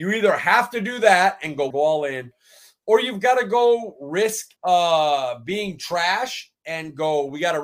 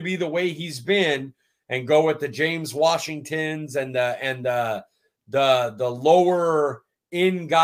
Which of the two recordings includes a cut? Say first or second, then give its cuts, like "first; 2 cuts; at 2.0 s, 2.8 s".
first; 2 cuts; at 1.7 s, 4.6 s